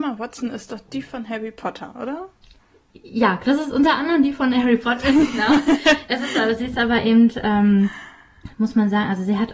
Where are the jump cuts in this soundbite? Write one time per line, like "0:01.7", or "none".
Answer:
none

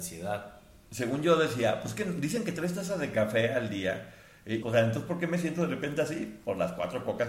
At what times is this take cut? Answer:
0:04.6

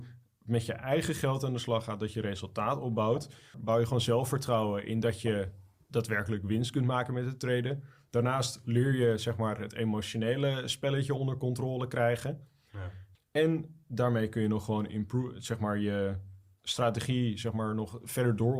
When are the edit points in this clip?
0:03.5
0:13.1

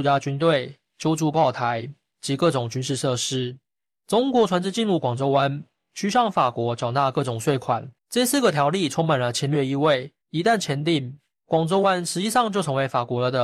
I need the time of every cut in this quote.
0:08.0
0:10.2

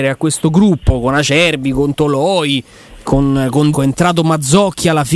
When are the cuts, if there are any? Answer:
0:03.7

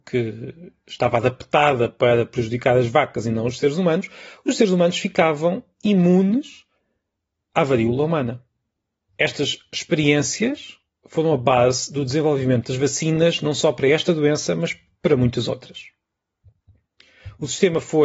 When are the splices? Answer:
none

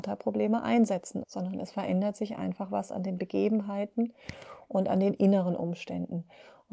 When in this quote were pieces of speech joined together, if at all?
0:01.2

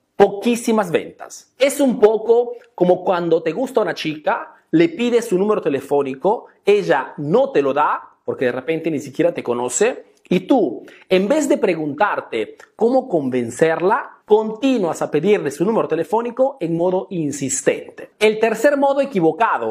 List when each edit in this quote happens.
0:18.1

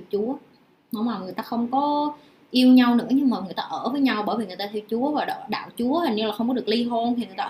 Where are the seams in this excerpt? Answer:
none

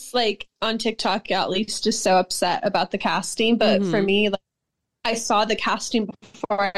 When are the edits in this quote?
none

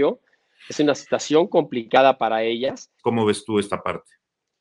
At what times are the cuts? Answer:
0:03.0

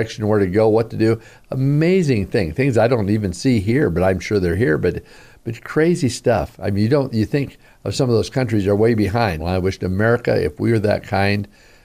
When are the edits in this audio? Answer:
0:09.4

